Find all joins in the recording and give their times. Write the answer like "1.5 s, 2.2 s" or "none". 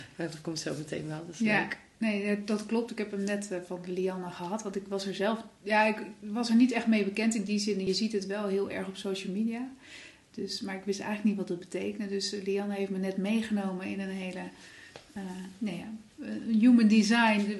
none